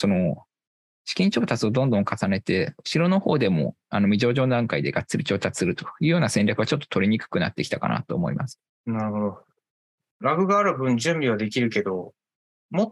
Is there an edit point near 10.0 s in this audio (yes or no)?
yes